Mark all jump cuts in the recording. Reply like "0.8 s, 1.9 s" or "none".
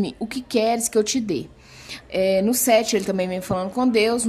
2.0 s